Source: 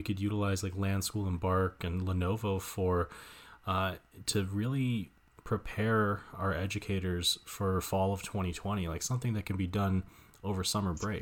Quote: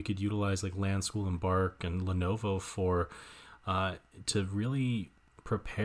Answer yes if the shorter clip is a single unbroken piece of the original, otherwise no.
yes